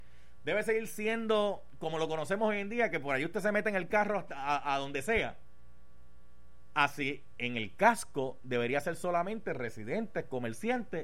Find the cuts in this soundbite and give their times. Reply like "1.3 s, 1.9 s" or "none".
none

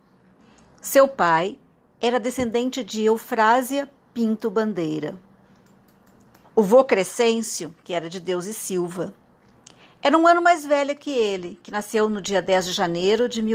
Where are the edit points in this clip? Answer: 6.4 s

